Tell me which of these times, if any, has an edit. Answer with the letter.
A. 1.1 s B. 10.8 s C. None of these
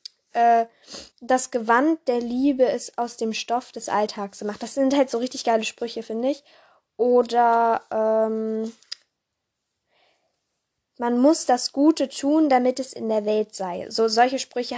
A